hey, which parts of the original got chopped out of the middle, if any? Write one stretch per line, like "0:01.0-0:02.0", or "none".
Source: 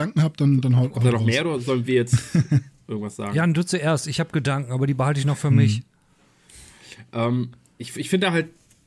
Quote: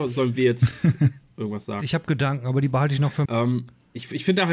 0:03.3-0:04.1
0:05.5-0:07.1